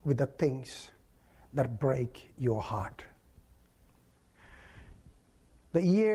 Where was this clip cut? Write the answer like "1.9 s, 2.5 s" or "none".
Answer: none